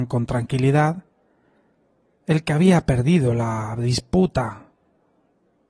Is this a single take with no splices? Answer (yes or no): yes